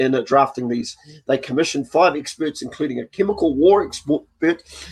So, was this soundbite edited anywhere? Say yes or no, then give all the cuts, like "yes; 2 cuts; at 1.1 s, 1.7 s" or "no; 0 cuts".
no; 0 cuts